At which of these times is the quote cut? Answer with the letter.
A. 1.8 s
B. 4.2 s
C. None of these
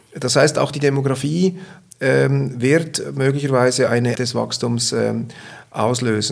B